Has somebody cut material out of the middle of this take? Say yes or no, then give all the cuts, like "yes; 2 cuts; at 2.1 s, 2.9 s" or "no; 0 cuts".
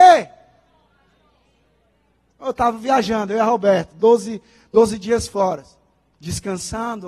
no; 0 cuts